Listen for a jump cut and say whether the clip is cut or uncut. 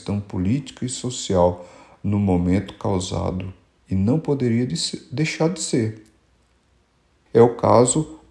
cut